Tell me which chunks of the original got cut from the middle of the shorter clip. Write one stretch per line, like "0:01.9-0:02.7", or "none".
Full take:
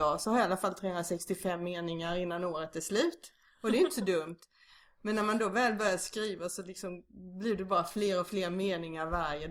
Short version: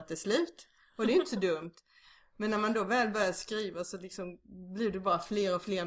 none

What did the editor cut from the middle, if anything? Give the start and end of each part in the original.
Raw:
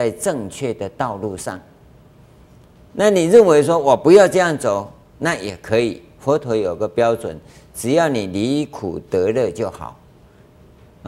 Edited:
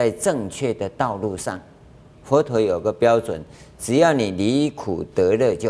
0:02.2-0:06.1

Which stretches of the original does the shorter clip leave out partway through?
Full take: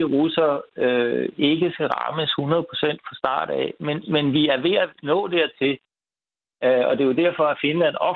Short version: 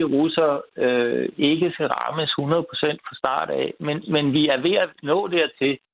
none

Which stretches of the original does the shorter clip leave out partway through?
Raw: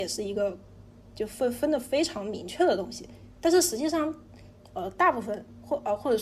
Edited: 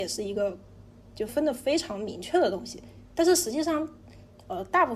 0:01.3-0:01.5

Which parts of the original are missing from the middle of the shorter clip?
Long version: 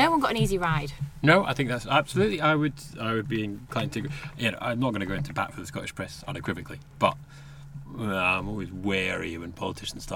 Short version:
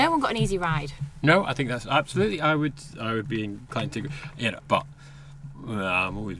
0:04.6-0:06.9

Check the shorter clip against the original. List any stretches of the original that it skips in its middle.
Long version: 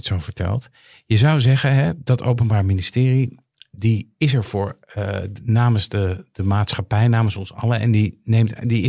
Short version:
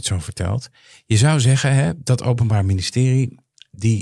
none

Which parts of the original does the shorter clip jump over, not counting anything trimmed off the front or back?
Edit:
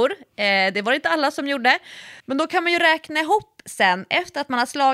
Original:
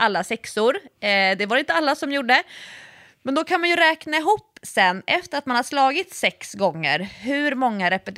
0:02.8-0:03.2

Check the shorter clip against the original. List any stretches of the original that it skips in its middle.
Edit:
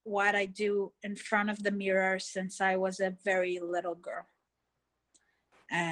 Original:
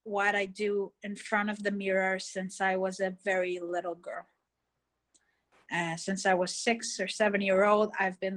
none

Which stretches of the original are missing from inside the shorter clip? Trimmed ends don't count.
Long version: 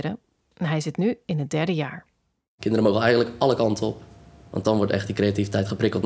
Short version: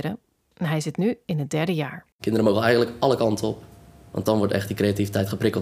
0:02.1-0:02.5

